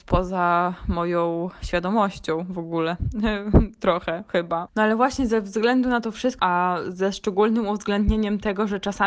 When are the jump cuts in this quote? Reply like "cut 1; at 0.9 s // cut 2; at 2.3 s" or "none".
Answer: cut 1; at 4.7 s // cut 2; at 6.4 s